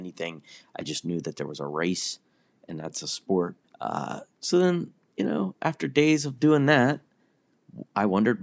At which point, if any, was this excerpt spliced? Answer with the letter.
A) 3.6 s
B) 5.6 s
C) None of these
A